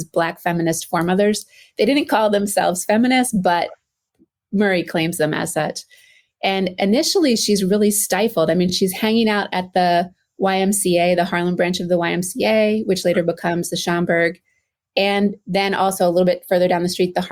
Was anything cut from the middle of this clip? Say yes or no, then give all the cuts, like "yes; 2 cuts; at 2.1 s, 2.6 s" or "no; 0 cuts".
no; 0 cuts